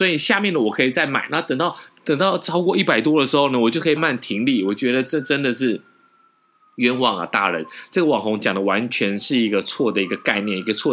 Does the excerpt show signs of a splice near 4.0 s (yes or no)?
yes